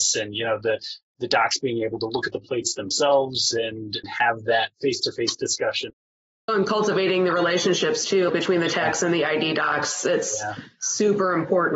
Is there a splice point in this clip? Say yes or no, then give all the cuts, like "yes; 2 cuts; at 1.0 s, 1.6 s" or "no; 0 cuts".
yes; 2 cuts; at 6.5 s, 8.3 s